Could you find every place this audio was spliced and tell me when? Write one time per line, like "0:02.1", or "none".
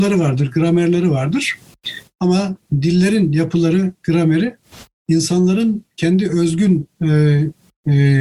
none